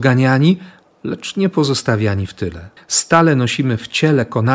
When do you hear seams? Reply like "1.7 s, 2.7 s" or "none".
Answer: 2.8 s